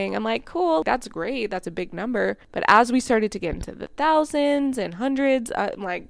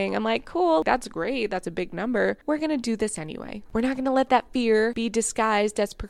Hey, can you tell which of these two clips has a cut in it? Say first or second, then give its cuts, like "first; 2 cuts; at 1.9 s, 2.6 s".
second; 2 cuts; at 2.4 s, 3.7 s